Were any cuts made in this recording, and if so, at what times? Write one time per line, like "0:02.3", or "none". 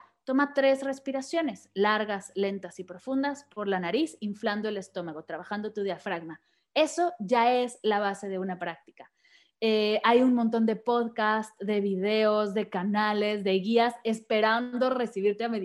none